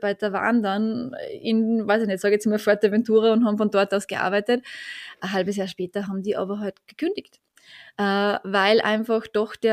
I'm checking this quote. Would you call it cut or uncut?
uncut